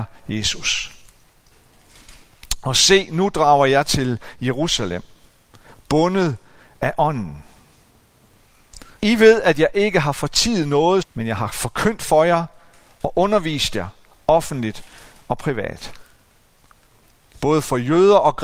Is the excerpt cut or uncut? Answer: cut